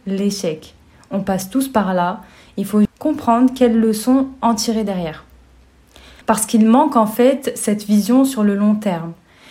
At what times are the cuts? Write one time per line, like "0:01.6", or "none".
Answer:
0:02.9
0:06.2